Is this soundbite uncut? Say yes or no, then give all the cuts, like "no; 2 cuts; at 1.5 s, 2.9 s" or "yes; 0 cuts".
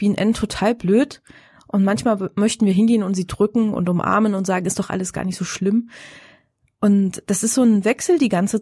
yes; 0 cuts